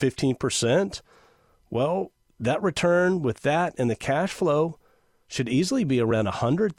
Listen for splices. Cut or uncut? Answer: uncut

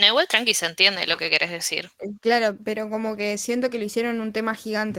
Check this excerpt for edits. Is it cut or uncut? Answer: cut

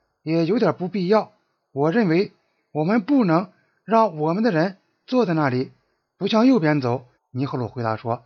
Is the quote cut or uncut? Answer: cut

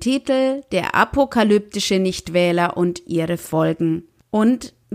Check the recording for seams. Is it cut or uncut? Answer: uncut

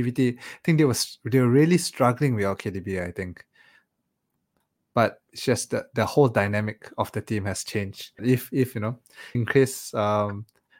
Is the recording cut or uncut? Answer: cut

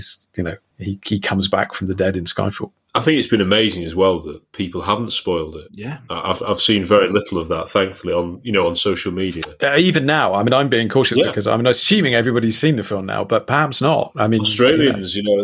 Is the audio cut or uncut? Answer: uncut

